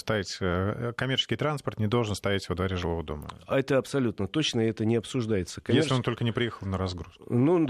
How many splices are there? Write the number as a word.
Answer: zero